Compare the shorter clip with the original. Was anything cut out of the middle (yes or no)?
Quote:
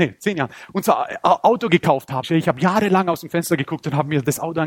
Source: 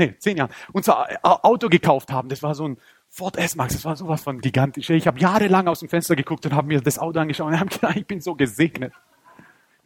yes